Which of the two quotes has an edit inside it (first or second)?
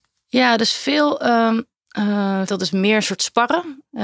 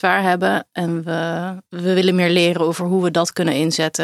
first